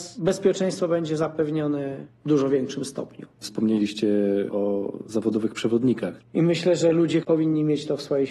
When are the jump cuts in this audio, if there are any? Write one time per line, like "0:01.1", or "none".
0:06.2
0:07.2